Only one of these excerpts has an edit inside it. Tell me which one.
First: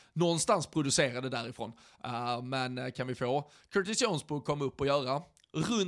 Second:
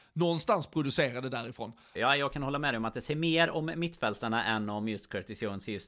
second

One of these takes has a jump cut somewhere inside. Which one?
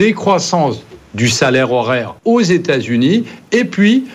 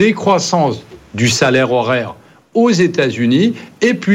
first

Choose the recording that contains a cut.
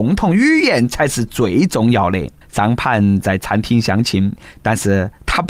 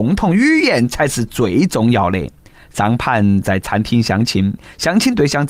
first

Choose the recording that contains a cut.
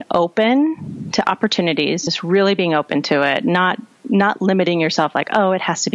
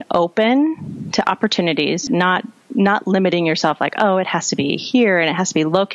second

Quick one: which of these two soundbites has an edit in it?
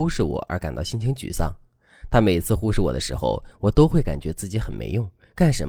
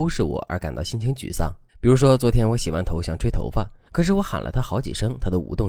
second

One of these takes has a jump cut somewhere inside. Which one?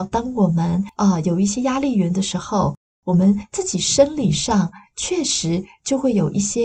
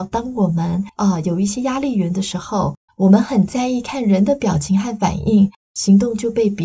second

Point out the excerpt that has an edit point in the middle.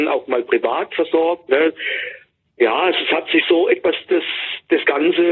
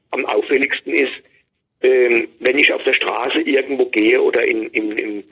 first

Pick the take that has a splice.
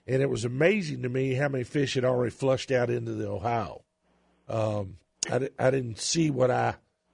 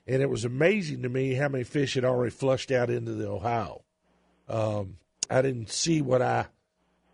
second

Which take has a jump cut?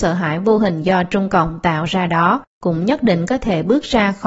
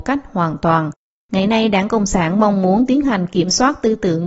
first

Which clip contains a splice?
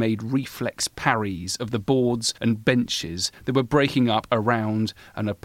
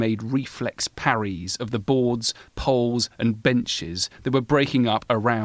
first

